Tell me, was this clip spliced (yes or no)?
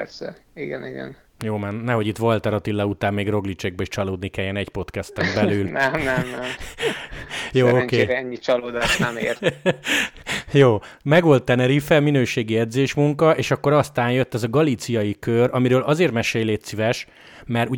no